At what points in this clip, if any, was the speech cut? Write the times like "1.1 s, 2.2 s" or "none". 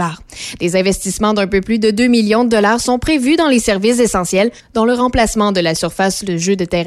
4.6 s